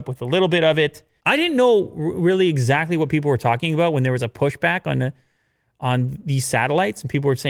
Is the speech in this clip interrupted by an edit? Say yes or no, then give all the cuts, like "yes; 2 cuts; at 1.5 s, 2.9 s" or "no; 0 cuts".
yes; 1 cut; at 1.2 s